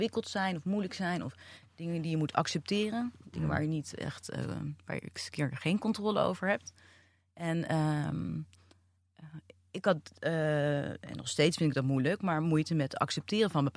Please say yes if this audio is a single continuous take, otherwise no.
yes